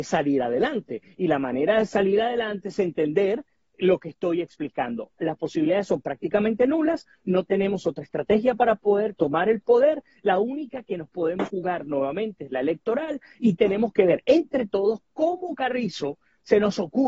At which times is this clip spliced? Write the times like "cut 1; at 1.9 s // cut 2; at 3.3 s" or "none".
none